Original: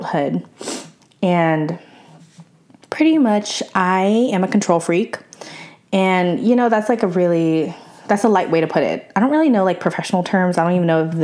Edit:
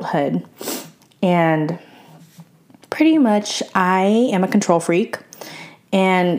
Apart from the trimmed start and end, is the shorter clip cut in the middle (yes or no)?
no